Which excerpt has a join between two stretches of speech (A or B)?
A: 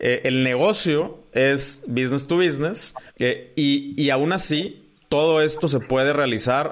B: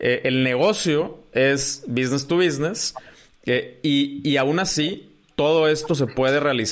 A